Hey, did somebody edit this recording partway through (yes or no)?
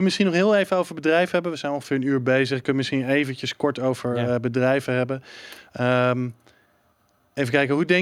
no